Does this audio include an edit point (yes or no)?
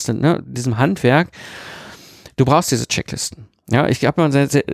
no